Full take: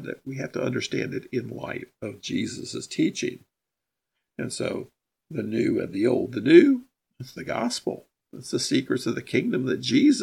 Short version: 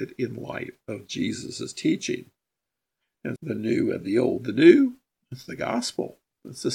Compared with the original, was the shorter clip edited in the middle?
yes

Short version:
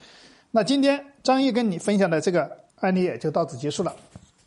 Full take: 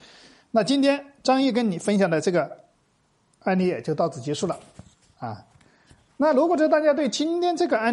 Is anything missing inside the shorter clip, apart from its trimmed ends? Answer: yes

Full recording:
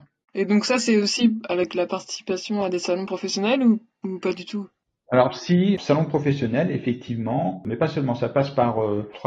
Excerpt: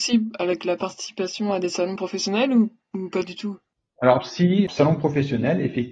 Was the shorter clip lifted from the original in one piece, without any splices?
yes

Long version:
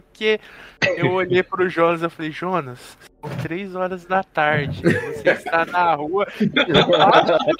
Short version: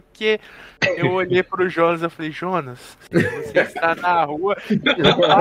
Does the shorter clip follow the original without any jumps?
no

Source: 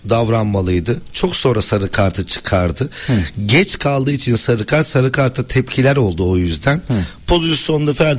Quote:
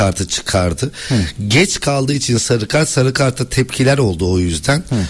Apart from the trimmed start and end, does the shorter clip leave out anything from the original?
no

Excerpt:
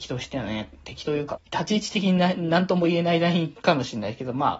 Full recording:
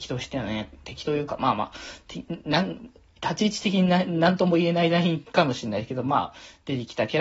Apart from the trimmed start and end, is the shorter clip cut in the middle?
yes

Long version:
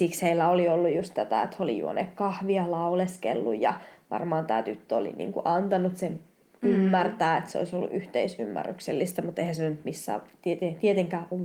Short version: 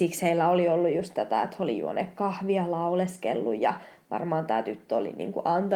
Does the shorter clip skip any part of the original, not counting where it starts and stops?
no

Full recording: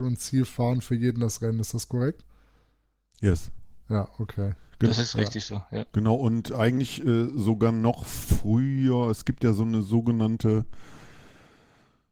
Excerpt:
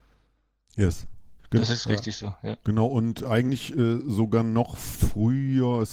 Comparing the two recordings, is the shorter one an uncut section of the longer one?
no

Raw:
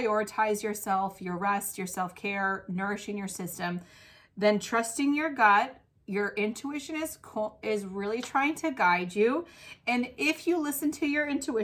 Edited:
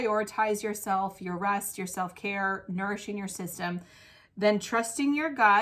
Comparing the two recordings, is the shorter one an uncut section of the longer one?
yes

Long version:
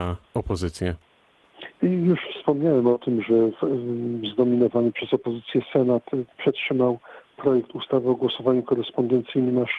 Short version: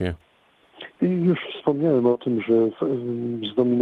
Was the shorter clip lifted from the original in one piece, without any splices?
yes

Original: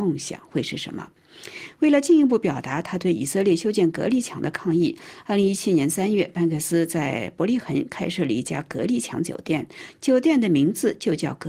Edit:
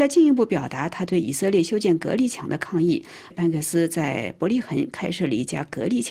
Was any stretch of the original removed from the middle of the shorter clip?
yes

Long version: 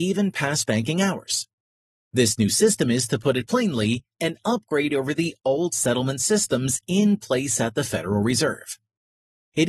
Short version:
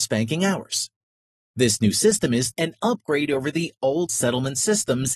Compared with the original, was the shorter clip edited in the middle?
yes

